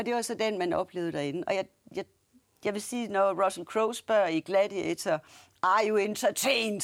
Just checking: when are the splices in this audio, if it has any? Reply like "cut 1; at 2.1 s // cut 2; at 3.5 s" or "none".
none